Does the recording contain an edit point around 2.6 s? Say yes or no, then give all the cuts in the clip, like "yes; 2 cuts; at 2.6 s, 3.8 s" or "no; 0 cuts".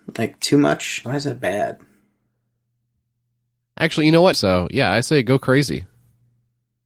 no; 2 cuts; at 1.0 s, 4.3 s